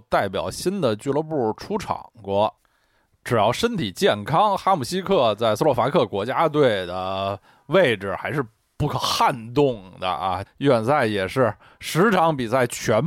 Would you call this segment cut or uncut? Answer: cut